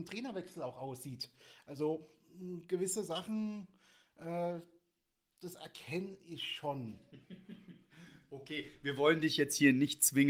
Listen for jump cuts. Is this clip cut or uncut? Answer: uncut